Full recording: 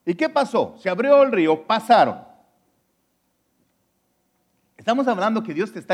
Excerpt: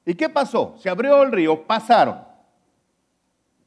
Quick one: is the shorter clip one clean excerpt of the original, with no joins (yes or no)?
yes